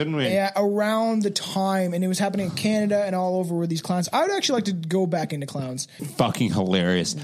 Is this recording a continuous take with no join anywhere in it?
no; 1 cut; at 6.0 s

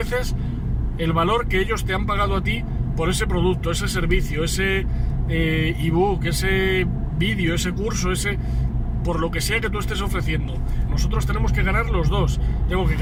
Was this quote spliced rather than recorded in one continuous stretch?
yes; 1 cut; at 10.9 s

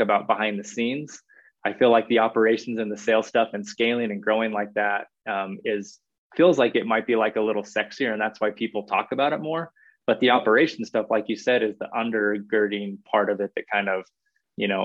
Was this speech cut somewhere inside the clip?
no; 0 cuts

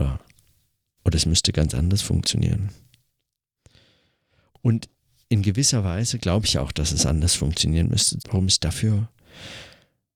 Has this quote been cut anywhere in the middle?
yes; 1 cut; at 8.2 s

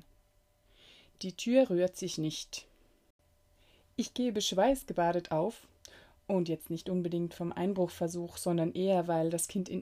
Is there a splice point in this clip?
no; 0 cuts

